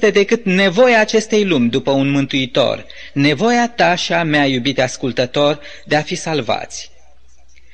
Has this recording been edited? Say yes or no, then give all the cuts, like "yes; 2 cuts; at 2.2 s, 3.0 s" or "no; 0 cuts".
no; 0 cuts